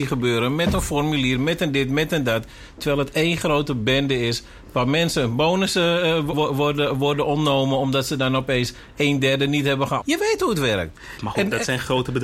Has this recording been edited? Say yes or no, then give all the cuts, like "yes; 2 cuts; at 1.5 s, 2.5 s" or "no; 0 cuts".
yes; 3 cuts; at 6.3 s, 10.0 s, 11.2 s